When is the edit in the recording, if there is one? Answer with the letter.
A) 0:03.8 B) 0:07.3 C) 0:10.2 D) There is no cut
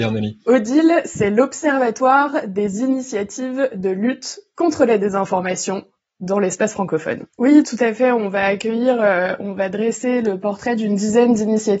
B